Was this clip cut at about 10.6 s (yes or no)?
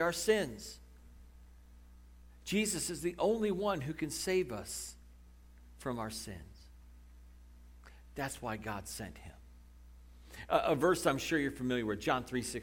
no